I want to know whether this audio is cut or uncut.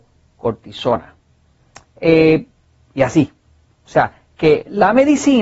uncut